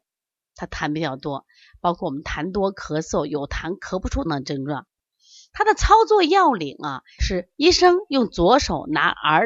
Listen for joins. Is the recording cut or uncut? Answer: cut